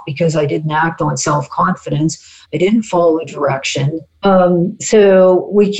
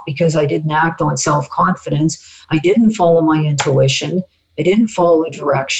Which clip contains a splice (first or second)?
first